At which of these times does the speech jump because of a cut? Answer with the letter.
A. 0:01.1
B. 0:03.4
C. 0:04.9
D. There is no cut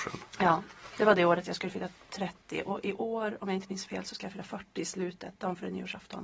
D